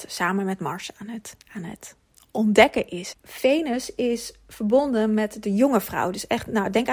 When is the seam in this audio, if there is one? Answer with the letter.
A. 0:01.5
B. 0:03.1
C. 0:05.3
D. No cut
B